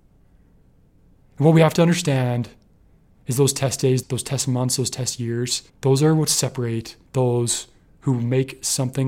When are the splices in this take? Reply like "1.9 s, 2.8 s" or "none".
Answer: 4.0 s, 5.7 s, 7.1 s